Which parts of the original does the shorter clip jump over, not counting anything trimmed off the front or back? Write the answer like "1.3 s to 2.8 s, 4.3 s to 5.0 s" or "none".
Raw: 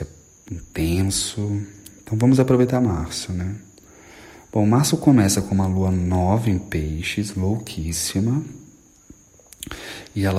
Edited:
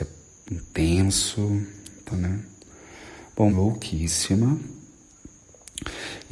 2.1 s to 3.3 s, 4.6 s to 7.3 s